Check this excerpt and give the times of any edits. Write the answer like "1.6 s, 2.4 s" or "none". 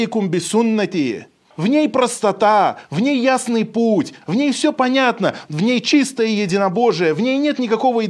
1.5 s, 4.2 s